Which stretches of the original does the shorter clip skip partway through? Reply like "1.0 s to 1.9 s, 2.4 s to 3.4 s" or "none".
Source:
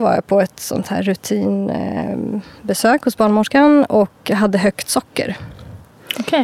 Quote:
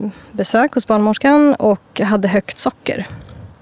none